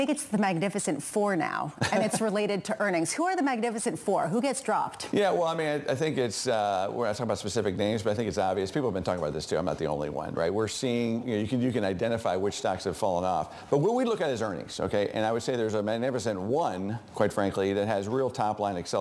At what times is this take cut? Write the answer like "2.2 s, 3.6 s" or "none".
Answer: none